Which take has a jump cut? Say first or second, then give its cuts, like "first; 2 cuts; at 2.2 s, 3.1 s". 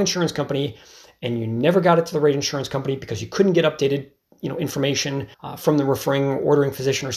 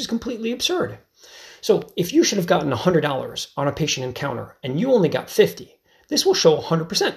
first; 1 cut; at 5.3 s